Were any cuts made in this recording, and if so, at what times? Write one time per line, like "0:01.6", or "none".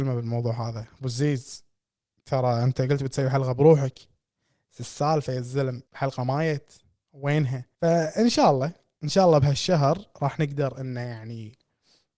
0:05.9
0:07.7